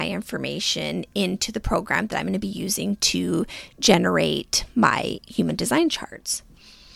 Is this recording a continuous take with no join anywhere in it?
yes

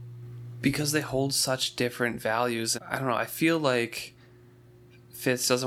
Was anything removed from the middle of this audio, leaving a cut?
yes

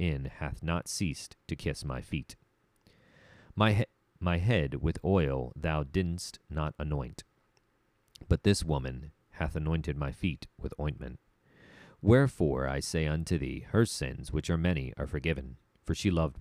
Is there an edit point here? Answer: no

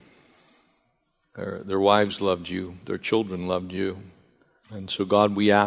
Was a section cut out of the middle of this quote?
yes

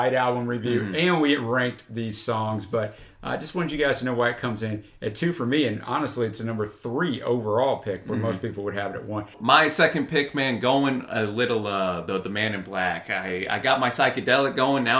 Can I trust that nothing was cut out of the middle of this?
yes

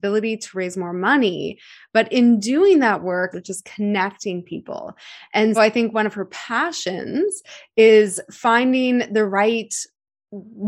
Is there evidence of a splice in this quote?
yes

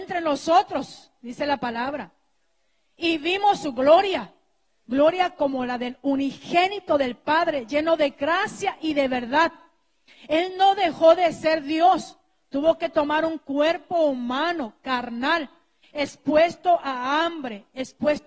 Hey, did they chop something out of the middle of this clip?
no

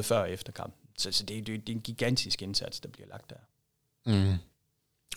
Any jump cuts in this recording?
no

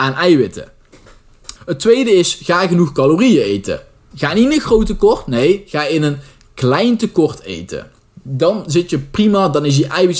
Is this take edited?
yes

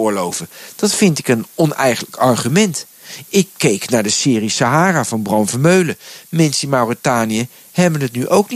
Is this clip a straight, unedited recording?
yes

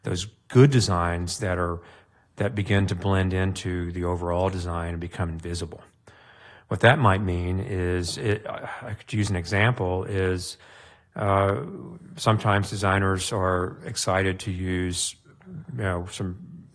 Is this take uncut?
yes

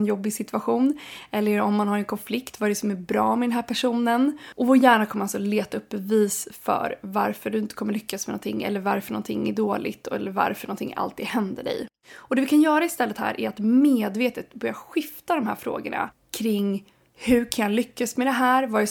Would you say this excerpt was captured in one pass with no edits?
no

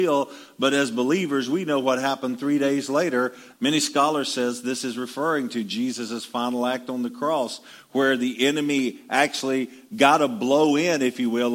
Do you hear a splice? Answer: yes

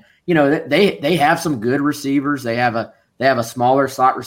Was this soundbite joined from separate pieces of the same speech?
no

